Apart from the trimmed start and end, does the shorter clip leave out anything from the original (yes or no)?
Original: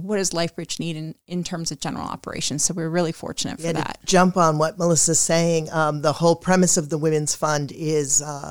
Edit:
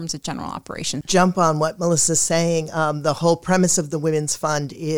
yes